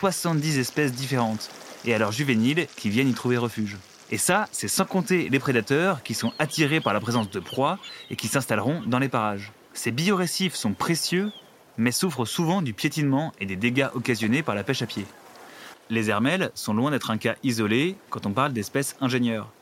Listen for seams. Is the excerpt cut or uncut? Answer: cut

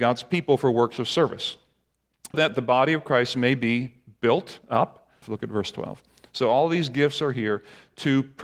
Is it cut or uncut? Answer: cut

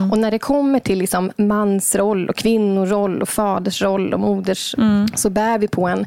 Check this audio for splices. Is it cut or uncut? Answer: cut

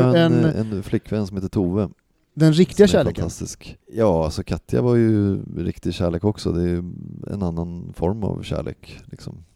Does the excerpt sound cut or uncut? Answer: cut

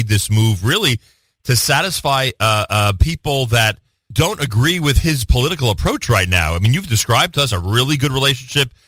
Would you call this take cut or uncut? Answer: cut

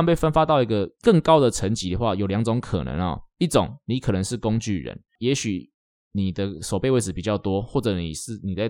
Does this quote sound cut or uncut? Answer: uncut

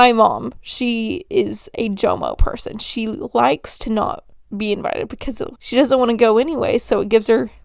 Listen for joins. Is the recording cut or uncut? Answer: cut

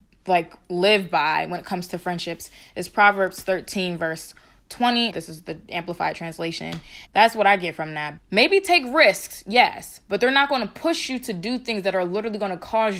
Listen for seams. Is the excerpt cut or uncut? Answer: cut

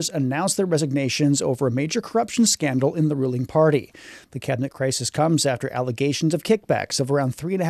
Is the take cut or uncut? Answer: uncut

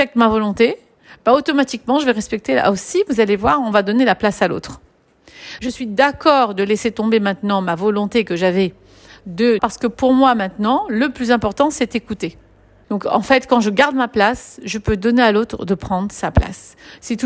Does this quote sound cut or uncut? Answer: cut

